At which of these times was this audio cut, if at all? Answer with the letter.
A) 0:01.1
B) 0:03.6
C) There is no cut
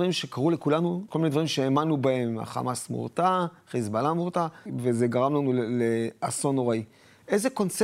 A